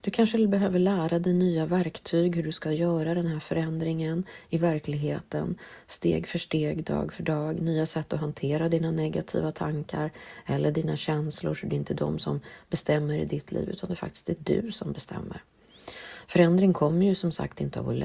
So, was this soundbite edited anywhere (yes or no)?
no